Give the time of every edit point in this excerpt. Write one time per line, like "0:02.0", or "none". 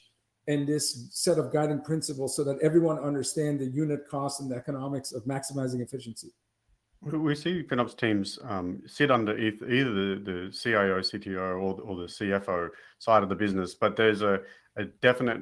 none